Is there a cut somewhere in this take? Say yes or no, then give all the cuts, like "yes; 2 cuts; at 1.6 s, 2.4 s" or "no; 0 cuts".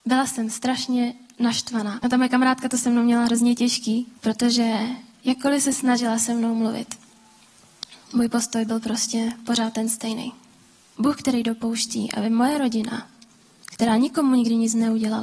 yes; 3 cuts; at 2.0 s, 4.2 s, 10.9 s